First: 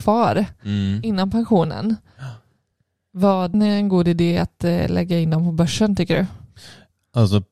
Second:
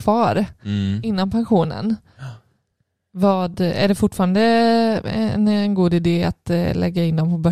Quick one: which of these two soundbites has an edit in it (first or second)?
first